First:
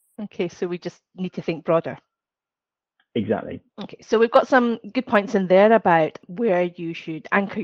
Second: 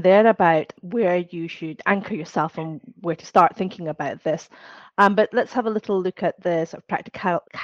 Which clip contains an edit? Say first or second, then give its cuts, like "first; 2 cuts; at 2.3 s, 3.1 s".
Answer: first; 1 cut; at 3.7 s